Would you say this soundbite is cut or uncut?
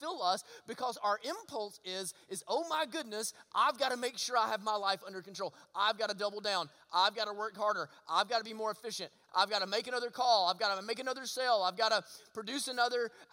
cut